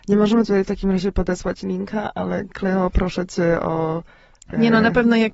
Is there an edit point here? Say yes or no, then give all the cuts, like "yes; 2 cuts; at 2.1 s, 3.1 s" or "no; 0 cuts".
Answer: no; 0 cuts